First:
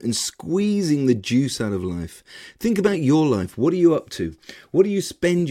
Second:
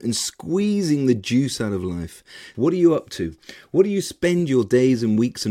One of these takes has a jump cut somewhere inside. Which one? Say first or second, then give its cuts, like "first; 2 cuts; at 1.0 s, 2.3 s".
second; 1 cut; at 2.5 s